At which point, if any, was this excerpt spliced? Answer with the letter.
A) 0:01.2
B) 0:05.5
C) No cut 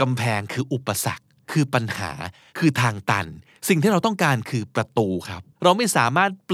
B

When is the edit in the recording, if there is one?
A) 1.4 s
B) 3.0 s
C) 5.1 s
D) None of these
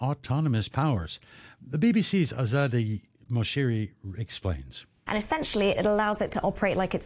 C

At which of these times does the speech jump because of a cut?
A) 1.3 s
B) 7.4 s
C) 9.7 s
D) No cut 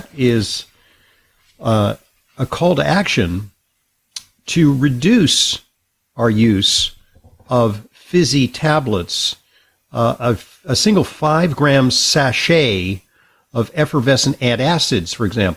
D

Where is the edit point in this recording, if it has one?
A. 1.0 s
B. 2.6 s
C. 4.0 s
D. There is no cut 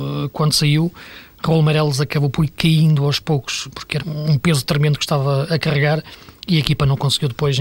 C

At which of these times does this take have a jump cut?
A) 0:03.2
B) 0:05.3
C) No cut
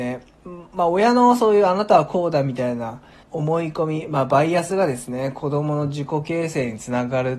A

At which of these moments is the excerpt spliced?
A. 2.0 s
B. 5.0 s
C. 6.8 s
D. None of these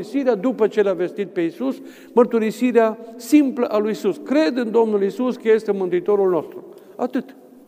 D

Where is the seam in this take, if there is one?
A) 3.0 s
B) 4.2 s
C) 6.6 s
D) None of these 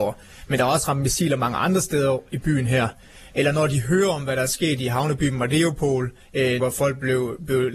C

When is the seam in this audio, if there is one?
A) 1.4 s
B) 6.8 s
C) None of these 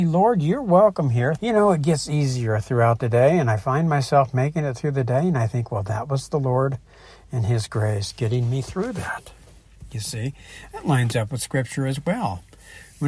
A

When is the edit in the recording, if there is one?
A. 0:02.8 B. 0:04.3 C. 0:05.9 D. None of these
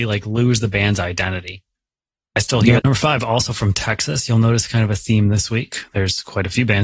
A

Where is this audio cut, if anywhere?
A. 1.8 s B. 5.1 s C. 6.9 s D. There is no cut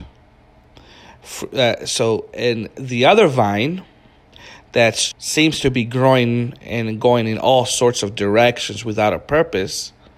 B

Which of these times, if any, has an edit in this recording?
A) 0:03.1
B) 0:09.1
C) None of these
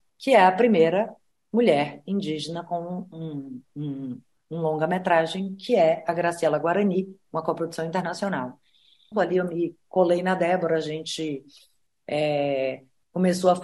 B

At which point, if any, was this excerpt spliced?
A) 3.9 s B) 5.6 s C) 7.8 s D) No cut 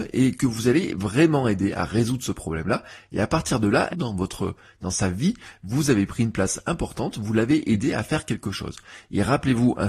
A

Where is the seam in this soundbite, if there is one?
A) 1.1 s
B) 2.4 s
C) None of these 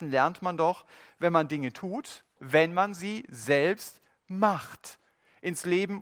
B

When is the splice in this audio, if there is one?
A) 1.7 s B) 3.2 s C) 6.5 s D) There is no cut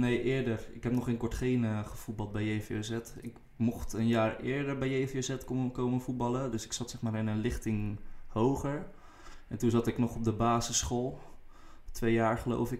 D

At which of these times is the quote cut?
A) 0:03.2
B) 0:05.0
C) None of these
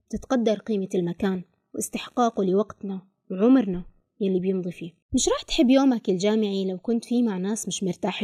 B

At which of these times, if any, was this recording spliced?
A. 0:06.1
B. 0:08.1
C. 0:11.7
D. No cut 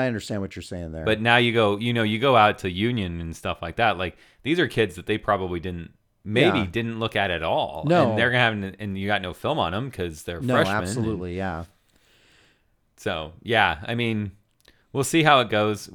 D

